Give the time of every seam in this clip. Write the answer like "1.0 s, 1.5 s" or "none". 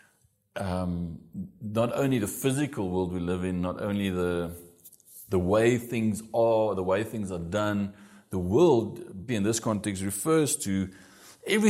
9.3 s